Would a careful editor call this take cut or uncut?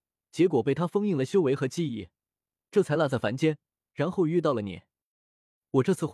uncut